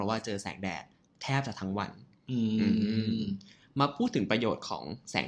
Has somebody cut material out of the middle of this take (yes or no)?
no